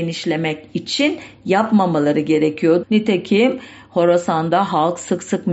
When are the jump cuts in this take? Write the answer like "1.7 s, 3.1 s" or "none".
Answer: 2.8 s